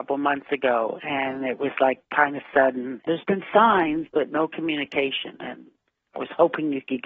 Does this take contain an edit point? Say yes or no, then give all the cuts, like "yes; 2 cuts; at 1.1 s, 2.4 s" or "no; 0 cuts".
yes; 1 cut; at 3.1 s